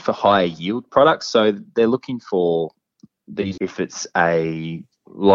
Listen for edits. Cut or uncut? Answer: cut